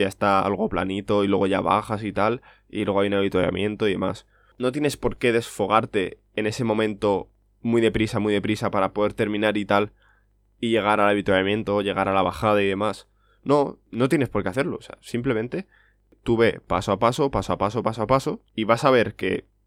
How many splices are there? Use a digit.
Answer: 1